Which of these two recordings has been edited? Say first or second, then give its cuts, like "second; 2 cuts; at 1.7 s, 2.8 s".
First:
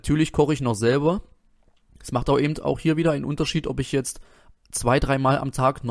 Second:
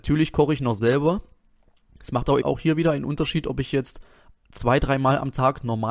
second; 1 cut; at 2.4 s